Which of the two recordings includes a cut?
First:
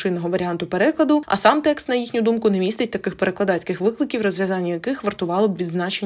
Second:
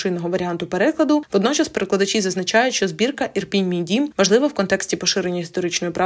second; 1 cut; at 1.3 s

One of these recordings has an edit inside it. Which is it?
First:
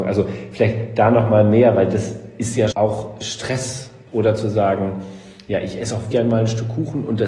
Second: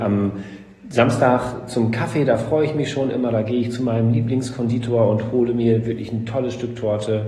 first; 3 cuts; at 2.7 s, 4.1 s, 6.1 s

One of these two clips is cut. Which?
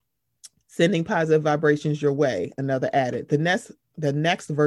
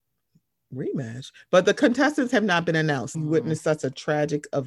second; 1 cut; at 3.1 s

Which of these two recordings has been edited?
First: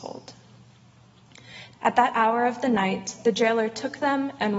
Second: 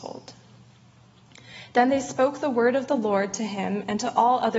first; 1 cut; at 1.7 s

